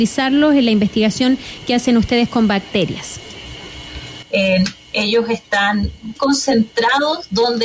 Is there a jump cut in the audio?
yes; 2 cuts; at 4.2 s, 6.2 s

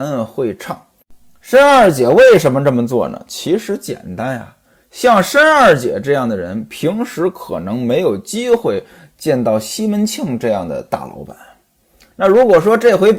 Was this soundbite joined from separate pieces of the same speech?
no; 0 cuts

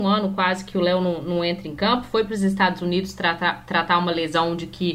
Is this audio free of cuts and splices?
yes; 0 cuts

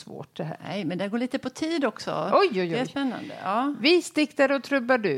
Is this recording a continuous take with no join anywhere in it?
yes; 0 cuts

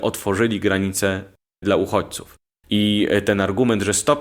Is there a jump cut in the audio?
no; 0 cuts

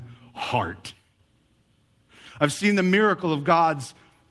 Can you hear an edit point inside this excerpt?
no; 0 cuts

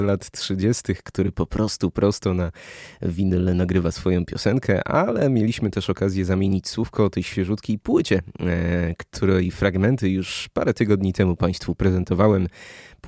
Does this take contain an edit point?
no; 0 cuts

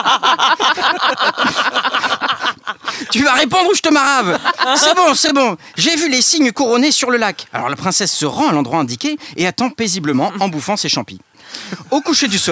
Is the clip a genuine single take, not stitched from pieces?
yes; 0 cuts

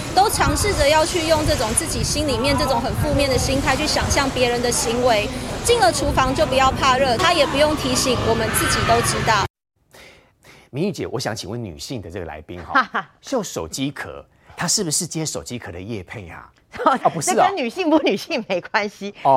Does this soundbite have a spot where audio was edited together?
yes; 2 cuts; at 10.3 s, 17.0 s

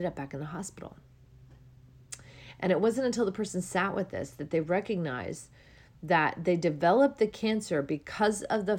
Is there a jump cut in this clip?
no; 0 cuts

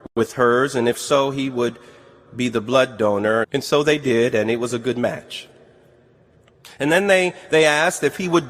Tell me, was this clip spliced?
yes; 1 cut; at 3.4 s

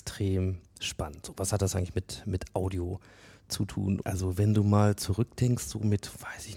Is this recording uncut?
no; 1 cut; at 4.0 s

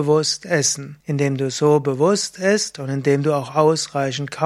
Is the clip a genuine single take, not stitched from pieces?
no; 1 cut; at 1.0 s

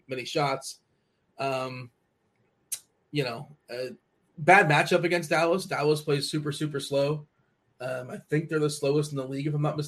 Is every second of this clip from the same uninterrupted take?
yes; 0 cuts

